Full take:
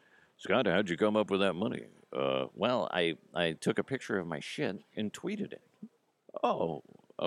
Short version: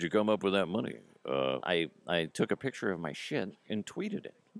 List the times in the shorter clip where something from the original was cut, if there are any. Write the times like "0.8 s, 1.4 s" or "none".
1.6 s